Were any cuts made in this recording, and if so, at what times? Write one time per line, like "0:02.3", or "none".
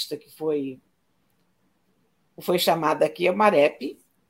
none